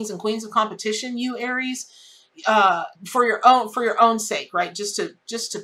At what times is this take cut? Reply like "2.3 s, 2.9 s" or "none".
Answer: 2.9 s